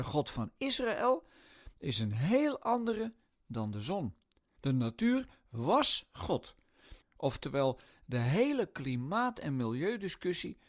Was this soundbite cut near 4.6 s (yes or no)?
yes